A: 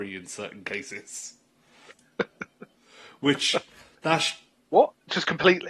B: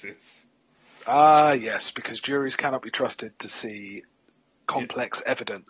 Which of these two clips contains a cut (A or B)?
A